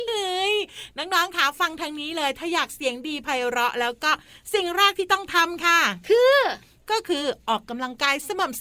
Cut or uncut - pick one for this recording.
uncut